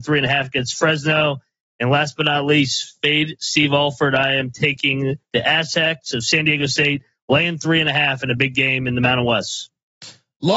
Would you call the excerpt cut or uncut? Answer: uncut